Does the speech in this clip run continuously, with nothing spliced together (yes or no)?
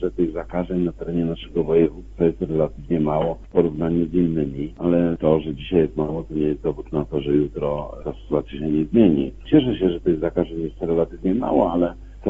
no